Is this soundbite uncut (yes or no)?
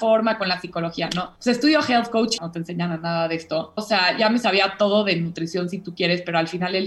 no